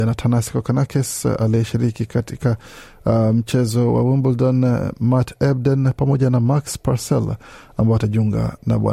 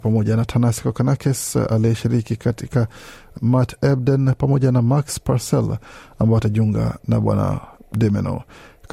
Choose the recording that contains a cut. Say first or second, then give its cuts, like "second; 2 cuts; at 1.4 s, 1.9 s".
second; 1 cut; at 3.4 s